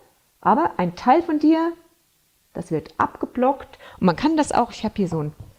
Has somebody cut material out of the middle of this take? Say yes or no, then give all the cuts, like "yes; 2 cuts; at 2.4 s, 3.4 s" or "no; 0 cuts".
no; 0 cuts